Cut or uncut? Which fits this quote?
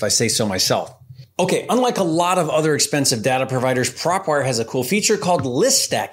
uncut